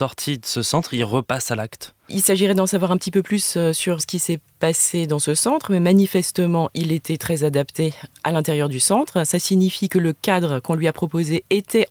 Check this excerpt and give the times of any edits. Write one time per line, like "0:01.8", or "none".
0:04.0